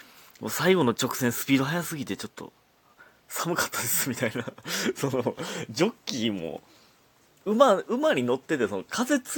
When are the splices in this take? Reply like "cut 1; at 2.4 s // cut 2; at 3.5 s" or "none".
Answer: none